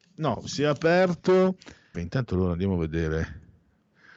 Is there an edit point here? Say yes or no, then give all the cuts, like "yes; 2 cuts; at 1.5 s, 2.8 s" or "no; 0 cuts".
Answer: yes; 1 cut; at 1.9 s